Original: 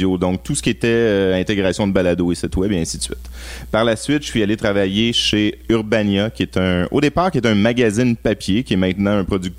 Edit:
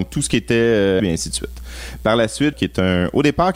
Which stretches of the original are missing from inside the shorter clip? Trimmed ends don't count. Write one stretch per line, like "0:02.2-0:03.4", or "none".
0:01.3-0:02.7
0:04.2-0:06.3

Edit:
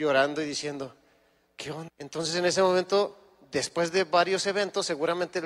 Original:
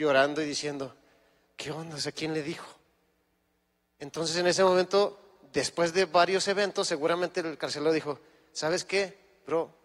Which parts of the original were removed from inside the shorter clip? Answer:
0:01.9-0:03.9

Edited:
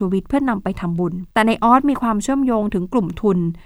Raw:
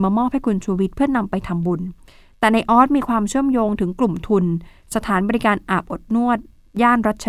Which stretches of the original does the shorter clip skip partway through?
0:02.0-0:02.4

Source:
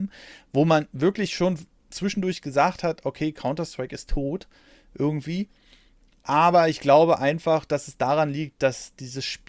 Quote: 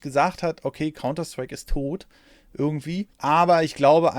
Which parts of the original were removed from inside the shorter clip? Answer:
0:05.5-0:06.2

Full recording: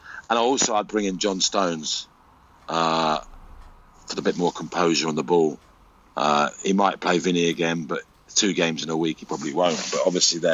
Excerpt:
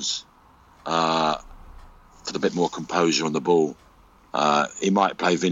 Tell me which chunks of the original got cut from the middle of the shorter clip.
none

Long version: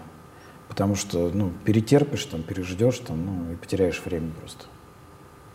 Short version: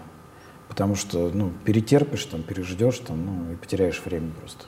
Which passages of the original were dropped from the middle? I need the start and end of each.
none

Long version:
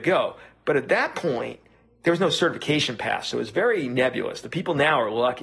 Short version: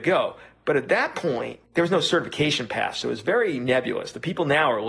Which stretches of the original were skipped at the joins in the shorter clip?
0:01.6-0:01.9

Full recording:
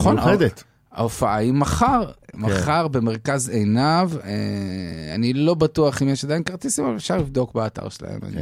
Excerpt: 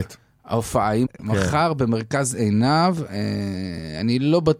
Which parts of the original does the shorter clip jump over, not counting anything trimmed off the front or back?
0:01.5-0:02.2

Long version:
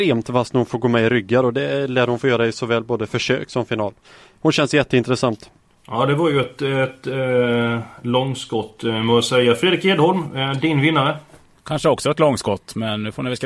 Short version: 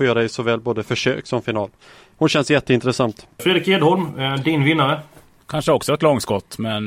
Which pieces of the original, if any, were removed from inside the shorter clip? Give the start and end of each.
0:05.6-0:09.6

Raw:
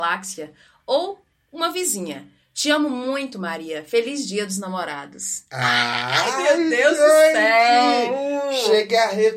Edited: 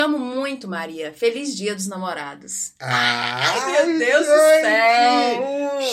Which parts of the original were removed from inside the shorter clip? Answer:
none

